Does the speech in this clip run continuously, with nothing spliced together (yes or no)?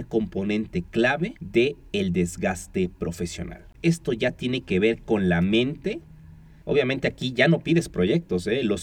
no